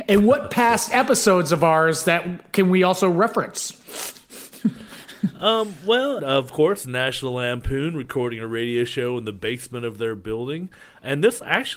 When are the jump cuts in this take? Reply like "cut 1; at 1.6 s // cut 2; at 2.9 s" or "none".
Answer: cut 1; at 6.2 s